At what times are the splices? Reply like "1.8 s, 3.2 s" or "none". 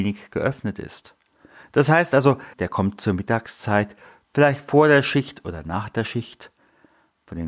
2.5 s